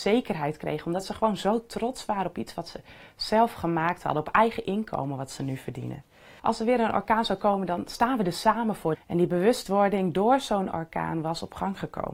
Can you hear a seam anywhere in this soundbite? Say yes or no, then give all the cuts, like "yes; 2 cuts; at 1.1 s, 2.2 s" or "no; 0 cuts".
yes; 2 cuts; at 6.4 s, 8.9 s